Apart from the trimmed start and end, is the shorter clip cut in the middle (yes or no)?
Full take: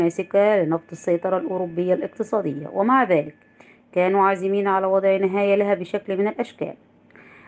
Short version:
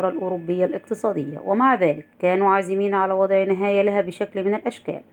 yes